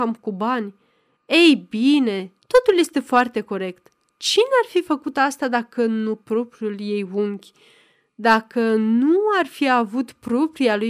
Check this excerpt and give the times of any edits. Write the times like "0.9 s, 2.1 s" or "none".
2.4 s

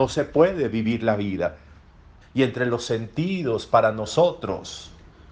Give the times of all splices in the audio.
2.2 s

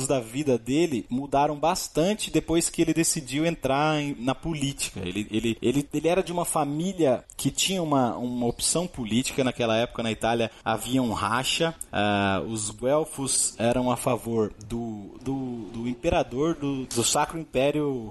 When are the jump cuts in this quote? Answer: 15.2 s, 16.9 s

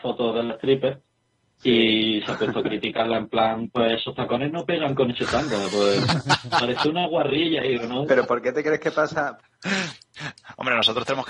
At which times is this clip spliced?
8.1 s, 9.4 s

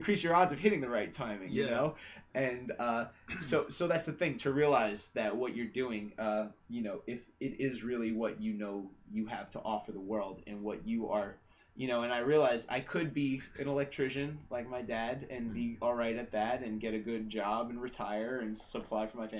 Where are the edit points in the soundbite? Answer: none

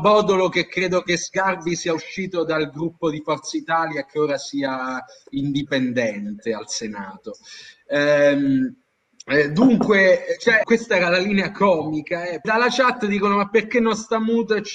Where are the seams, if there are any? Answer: 10.6 s, 12.4 s

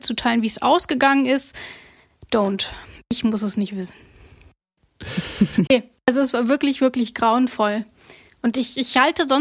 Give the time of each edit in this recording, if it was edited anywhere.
5.7 s

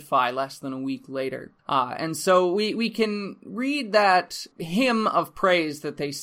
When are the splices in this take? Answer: 1.6 s, 4.5 s

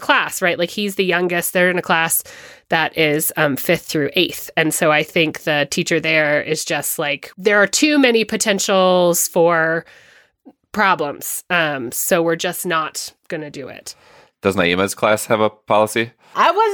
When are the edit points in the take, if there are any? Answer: none

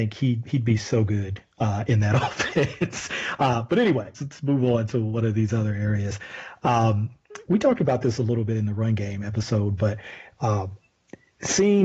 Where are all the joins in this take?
4.1 s

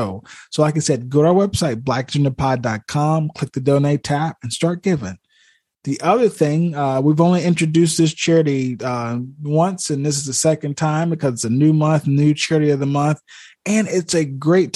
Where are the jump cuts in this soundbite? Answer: none

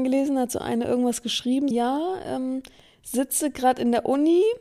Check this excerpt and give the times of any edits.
1.7 s

